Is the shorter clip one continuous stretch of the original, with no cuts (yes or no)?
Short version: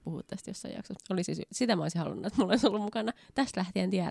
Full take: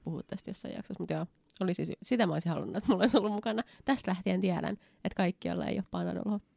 no